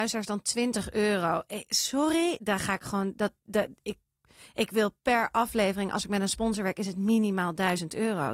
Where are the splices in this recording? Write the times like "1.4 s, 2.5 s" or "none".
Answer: 2.4 s